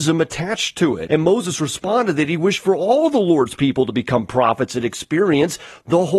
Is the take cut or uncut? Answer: cut